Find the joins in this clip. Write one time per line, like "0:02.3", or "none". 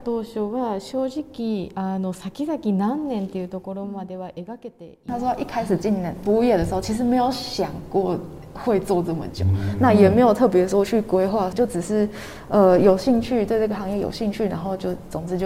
0:11.5